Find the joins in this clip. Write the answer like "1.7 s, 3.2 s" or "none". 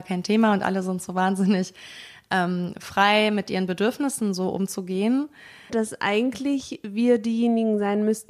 5.7 s